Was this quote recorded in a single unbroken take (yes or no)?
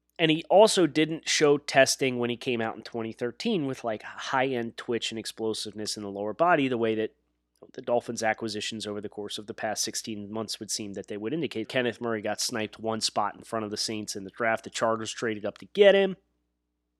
no